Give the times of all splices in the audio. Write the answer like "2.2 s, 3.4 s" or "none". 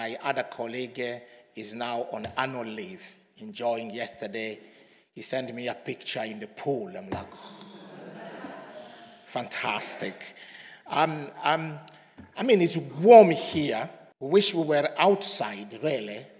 14.1 s

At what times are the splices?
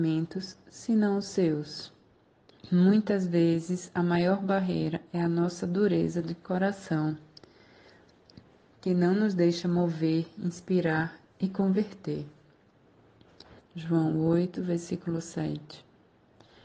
2.6 s, 13.6 s

